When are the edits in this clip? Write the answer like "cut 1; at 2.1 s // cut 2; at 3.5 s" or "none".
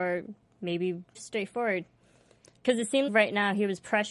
cut 1; at 1.1 s // cut 2; at 3.1 s